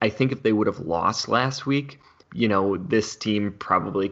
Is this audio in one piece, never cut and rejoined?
no; 1 cut; at 2.2 s

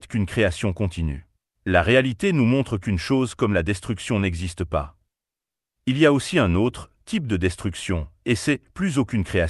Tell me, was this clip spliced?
yes; 2 cuts; at 1.5 s, 5.7 s

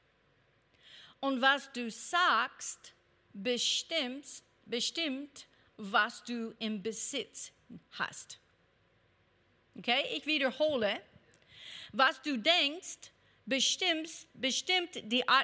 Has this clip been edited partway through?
no; 0 cuts

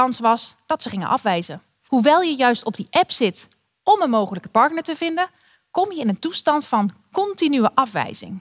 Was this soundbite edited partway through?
yes; 1 cut; at 1.9 s

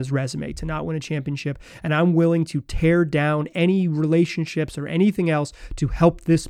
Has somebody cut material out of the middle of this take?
no; 0 cuts

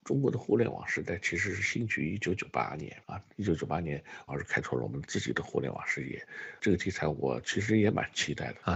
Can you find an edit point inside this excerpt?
yes; 2 cuts; at 3.0 s, 4.3 s

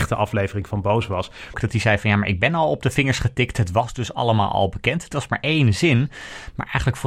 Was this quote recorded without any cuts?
no; 1 cut; at 1.5 s

